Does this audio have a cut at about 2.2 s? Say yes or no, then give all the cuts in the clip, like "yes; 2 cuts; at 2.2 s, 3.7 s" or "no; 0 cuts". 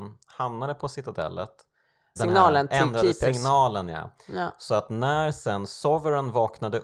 yes; 1 cut; at 2.2 s